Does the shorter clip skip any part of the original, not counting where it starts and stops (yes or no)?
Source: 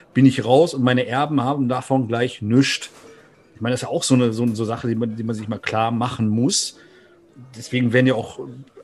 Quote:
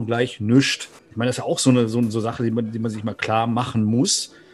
yes